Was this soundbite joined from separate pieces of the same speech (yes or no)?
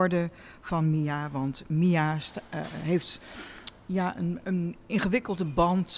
yes